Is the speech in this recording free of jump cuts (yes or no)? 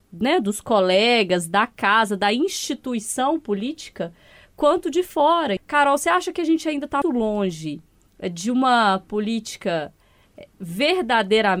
no